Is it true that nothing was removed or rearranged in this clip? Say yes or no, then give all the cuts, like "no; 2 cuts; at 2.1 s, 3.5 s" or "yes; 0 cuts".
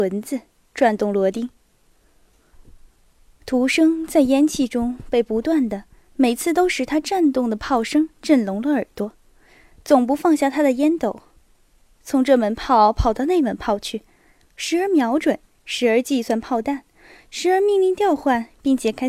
yes; 0 cuts